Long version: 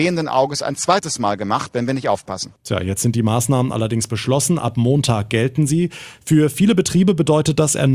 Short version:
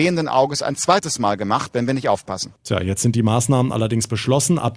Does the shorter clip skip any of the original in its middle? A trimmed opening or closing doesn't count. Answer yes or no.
no